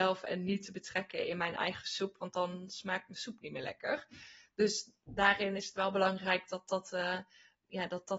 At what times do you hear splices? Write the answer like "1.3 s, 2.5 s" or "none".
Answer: none